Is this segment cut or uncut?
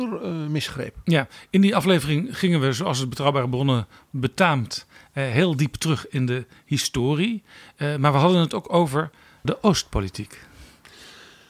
uncut